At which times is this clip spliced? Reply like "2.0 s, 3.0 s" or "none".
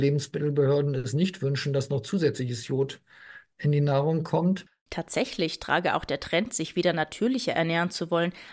none